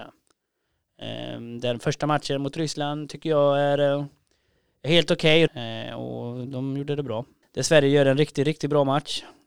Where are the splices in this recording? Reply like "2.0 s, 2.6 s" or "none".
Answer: 5.5 s, 7.4 s